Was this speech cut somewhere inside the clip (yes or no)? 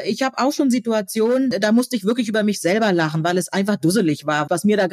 no